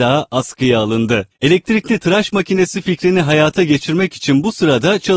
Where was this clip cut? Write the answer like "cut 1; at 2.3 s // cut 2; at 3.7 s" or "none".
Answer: cut 1; at 1.3 s